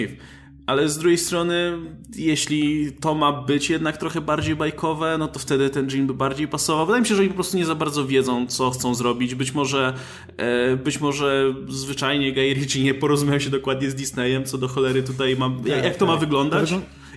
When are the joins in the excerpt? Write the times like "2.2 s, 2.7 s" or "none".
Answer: none